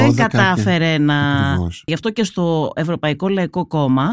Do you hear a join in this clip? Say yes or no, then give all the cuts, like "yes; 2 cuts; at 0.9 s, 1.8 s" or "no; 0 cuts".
yes; 1 cut; at 1.9 s